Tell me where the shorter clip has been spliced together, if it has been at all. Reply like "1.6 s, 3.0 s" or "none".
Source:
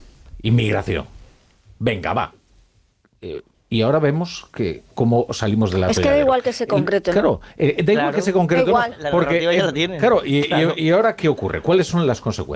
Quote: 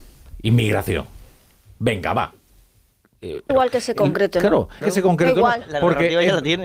3.5 s, 4.8 s